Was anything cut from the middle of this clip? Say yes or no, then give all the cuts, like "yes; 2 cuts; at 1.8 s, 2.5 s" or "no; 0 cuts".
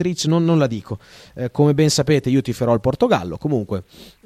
no; 0 cuts